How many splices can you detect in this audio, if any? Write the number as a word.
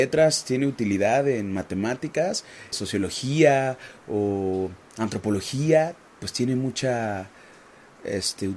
one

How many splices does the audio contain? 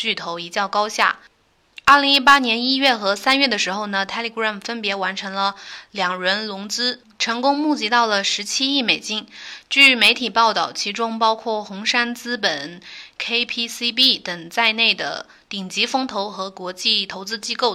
zero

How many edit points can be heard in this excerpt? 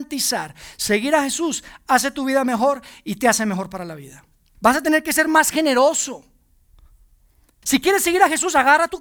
two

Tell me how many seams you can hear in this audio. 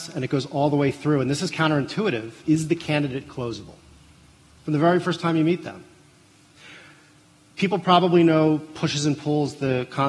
one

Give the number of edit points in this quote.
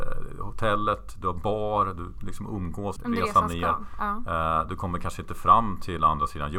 one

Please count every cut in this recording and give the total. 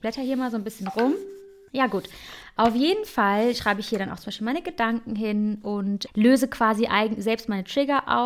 two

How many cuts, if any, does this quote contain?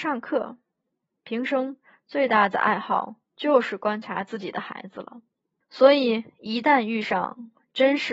one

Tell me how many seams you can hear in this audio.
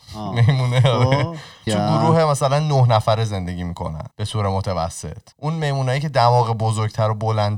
three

